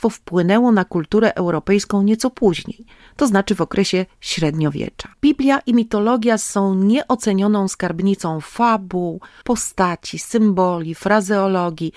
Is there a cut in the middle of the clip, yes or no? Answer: yes